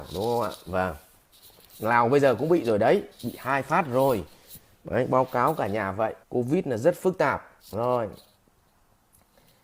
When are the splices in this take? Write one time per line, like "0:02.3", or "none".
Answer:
0:06.2
0:07.6